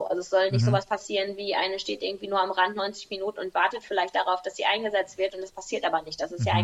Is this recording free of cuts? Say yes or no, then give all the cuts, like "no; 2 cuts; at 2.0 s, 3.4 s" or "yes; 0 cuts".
yes; 0 cuts